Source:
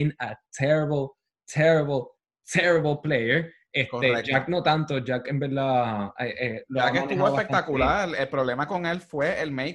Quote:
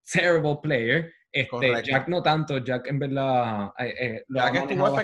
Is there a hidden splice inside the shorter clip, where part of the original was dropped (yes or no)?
no